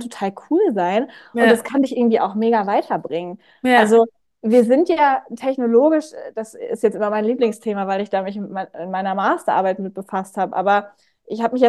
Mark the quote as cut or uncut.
uncut